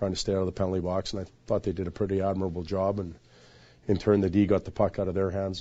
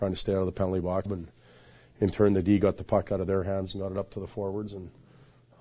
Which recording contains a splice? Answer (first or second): second